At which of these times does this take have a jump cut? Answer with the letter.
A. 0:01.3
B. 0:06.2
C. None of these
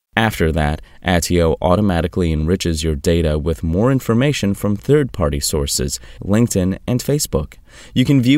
B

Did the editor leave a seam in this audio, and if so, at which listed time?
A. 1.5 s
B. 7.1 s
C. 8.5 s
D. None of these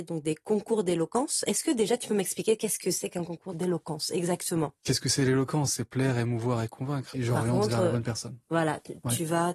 B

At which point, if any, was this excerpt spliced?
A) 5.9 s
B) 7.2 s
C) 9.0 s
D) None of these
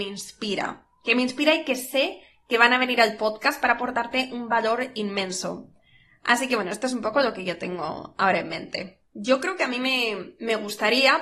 C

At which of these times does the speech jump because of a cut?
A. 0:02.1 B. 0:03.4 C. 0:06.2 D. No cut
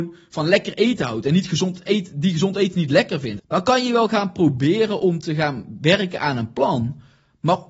B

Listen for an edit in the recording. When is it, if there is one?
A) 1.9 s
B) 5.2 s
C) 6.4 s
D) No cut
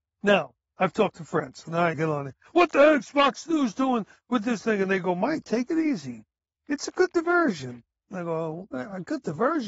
A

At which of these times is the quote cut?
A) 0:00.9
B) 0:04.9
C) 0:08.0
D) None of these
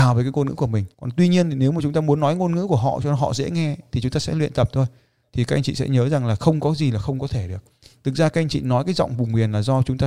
A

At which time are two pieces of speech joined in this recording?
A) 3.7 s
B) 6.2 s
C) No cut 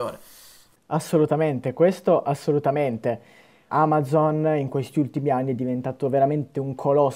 A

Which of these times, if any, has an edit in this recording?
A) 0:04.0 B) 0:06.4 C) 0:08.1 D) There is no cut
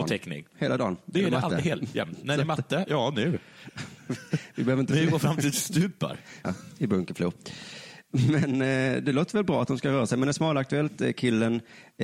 B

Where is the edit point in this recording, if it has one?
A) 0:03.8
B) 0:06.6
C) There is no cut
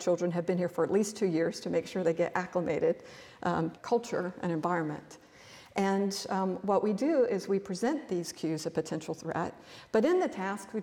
A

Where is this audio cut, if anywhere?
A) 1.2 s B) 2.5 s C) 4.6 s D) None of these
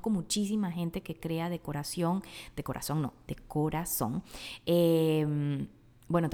D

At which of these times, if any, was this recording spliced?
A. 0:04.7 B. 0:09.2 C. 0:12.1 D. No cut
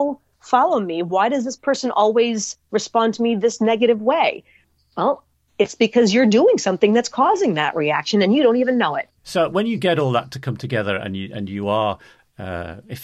B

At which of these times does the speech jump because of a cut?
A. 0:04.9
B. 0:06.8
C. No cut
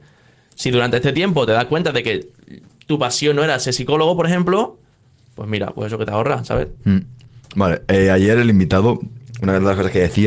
B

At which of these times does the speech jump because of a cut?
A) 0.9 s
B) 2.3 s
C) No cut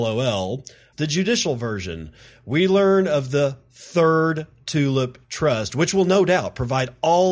A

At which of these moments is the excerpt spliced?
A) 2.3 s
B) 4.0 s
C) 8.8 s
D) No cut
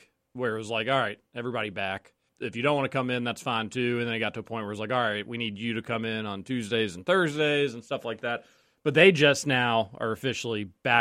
A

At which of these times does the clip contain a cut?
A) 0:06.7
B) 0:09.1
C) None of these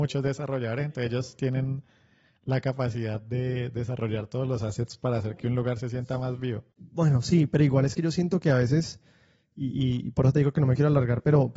C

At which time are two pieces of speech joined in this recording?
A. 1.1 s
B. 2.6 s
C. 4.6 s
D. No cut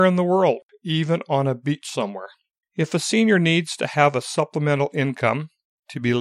B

